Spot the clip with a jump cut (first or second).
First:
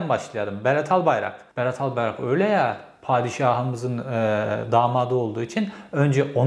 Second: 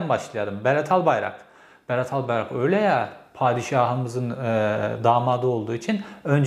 first